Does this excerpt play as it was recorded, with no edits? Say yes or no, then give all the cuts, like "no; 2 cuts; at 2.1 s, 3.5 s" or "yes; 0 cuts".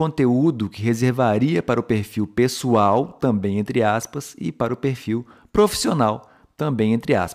yes; 0 cuts